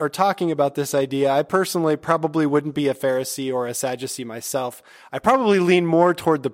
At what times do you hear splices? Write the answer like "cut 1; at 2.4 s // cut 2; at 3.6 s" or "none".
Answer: none